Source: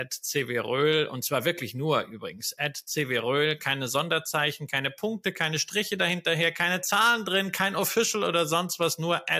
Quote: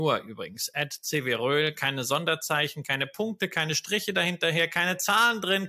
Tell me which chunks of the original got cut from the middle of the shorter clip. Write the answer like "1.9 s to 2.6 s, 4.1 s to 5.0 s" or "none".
none

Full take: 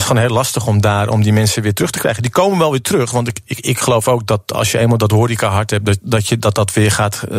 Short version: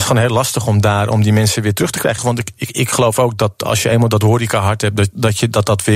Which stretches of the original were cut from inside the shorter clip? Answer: 2.2 s to 3.1 s

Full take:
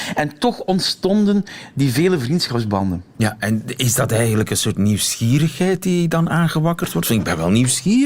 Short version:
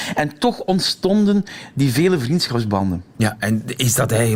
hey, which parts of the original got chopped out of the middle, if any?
none

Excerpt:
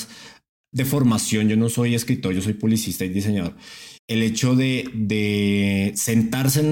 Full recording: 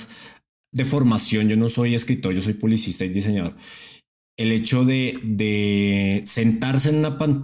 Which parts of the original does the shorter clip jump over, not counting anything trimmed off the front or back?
4.0 s to 4.3 s

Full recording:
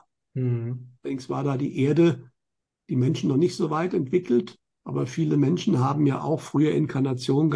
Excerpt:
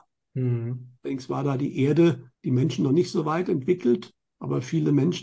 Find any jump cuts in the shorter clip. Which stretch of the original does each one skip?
2.3 s to 2.8 s

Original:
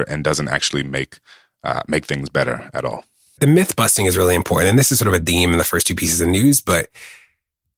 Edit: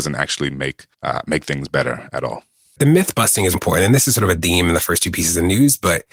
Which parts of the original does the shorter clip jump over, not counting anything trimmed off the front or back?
1.3 s to 1.5 s, 4.1 s to 4.4 s

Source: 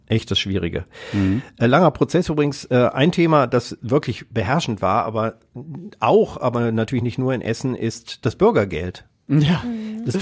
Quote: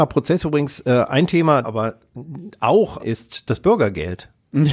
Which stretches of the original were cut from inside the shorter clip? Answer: 3.5 s to 5.0 s, 6.4 s to 7.8 s

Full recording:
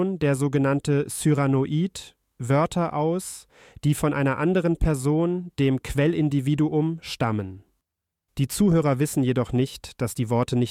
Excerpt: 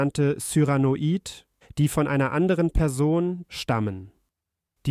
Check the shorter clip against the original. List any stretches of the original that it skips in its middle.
2.3 s to 3.7 s, 5.5 s to 7.0 s

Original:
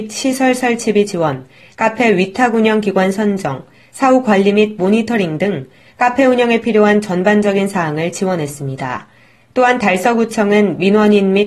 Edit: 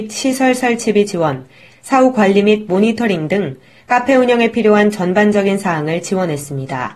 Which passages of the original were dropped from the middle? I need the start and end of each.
1.7 s to 3.8 s

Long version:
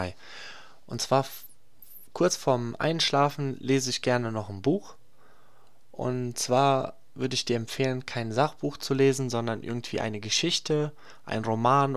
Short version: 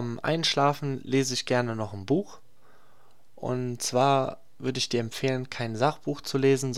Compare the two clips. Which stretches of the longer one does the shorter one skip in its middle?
none

